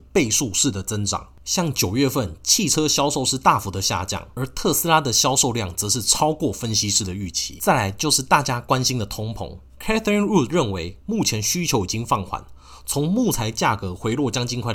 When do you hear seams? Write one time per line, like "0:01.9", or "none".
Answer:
none